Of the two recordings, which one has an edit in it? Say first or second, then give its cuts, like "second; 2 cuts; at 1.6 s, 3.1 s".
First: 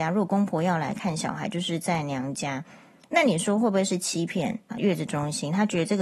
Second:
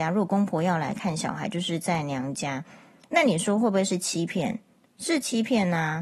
first; 1 cut; at 4.7 s